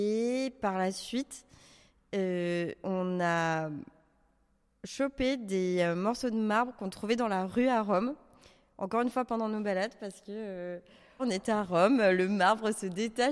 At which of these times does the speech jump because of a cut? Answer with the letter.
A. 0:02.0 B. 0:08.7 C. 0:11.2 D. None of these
C